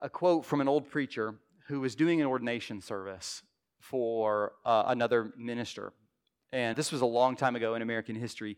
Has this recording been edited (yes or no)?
yes